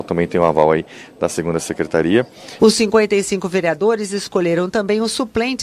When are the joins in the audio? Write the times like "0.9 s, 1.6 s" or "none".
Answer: 2.6 s